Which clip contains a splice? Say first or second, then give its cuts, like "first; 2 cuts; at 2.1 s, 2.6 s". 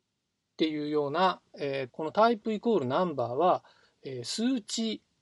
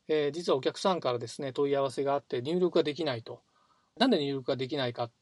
first; 1 cut; at 1.9 s